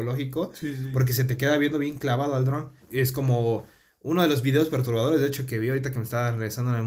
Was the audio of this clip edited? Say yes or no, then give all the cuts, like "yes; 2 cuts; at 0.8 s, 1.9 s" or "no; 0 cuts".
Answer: yes; 1 cut; at 2.8 s